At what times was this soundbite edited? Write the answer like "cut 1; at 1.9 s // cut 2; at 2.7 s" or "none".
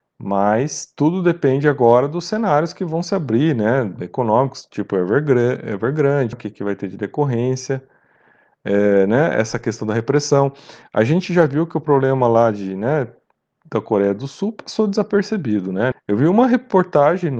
cut 1; at 6.3 s // cut 2; at 15.9 s